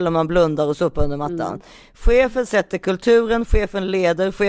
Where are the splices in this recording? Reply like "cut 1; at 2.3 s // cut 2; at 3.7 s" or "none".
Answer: none